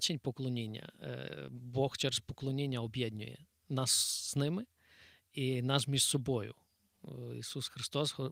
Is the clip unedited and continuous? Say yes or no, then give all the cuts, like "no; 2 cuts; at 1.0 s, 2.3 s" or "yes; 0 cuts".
yes; 0 cuts